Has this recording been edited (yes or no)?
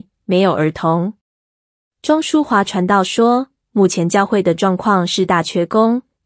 no